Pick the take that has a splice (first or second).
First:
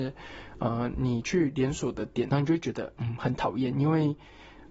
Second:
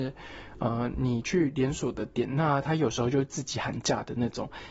first